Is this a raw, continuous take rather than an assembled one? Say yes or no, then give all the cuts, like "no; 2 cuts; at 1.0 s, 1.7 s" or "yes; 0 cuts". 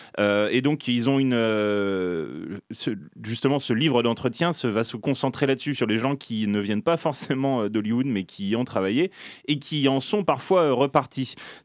yes; 0 cuts